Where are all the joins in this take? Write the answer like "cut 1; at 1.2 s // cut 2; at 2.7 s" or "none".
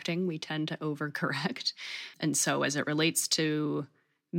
cut 1; at 2.1 s